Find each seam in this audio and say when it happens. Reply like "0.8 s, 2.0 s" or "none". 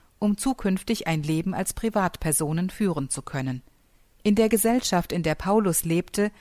4.0 s